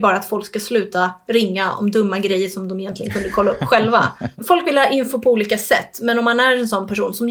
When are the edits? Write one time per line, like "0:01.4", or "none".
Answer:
none